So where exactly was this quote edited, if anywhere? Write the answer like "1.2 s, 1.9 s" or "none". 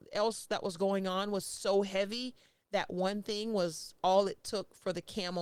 none